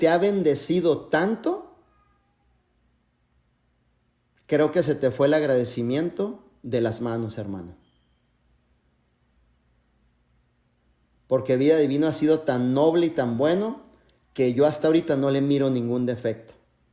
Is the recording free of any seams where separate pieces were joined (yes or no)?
yes